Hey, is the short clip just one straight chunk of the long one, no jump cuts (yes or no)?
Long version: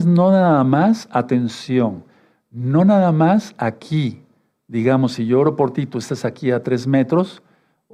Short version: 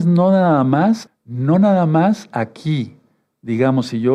no